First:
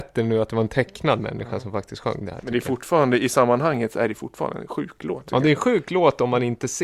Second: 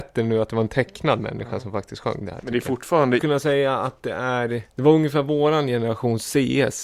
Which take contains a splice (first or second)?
second